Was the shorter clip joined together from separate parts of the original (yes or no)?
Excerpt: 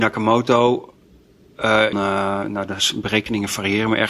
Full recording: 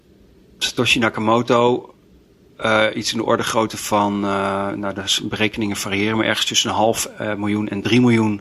yes